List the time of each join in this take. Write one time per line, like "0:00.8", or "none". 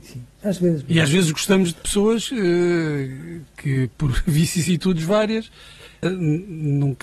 0:06.0